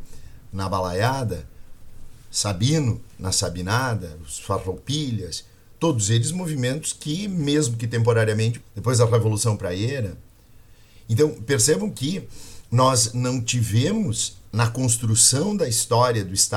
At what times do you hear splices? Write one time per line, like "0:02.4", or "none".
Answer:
0:08.6